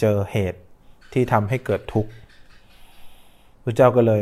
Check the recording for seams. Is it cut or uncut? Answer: uncut